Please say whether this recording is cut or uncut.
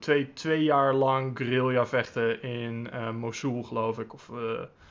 uncut